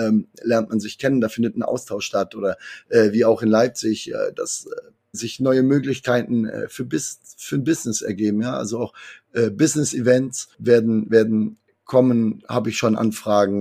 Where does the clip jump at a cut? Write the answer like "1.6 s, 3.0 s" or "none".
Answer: 5.1 s